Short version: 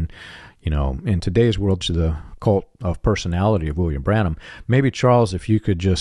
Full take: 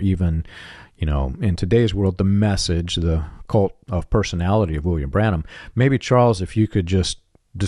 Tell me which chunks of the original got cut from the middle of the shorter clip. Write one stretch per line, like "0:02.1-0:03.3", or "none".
0:02.2-0:02.9